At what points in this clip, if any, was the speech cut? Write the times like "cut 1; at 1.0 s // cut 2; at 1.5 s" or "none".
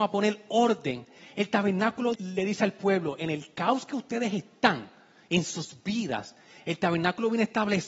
cut 1; at 2.1 s